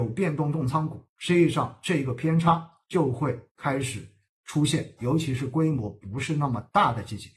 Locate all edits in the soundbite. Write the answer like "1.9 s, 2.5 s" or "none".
5.0 s